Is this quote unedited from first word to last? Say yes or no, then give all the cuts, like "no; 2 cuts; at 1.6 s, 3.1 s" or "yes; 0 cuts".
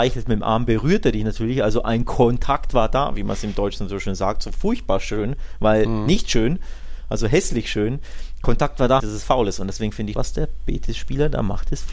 no; 2 cuts; at 9.0 s, 10.1 s